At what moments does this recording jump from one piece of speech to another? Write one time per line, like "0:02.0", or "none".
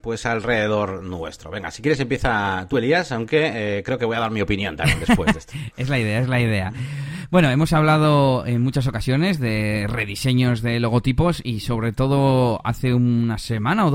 none